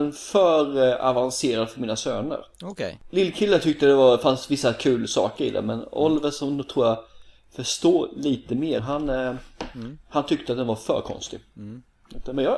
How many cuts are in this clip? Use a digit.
1